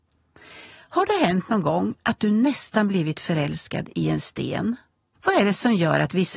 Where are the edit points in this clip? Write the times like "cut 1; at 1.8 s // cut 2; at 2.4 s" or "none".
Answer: cut 1; at 5.1 s